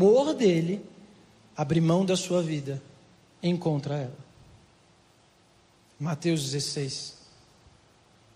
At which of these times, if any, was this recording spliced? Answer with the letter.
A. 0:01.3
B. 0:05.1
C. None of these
C